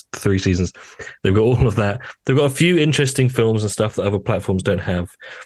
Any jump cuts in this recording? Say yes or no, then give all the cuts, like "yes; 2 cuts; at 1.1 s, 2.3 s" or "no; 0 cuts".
no; 0 cuts